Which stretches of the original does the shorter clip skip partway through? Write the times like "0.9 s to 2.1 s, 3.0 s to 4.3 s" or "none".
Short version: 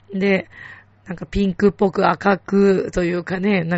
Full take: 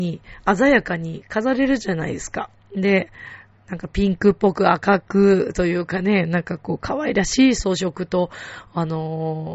none